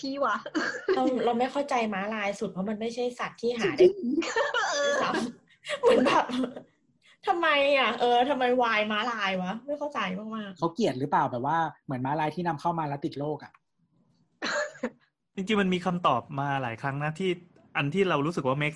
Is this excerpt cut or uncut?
uncut